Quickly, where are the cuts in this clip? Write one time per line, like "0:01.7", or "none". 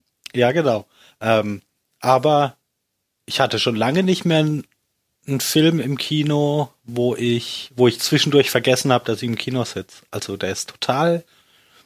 none